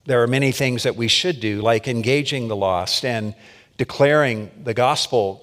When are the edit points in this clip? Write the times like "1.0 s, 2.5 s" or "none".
none